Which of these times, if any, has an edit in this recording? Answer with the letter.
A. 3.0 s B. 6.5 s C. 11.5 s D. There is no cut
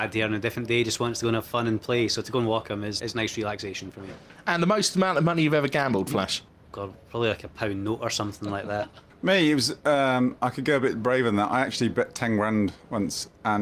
A